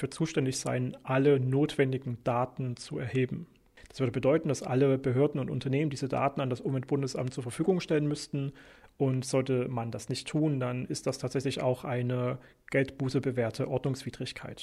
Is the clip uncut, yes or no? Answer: yes